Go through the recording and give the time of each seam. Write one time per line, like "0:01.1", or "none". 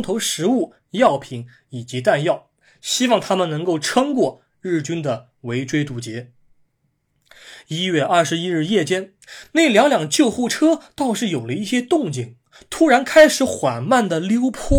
none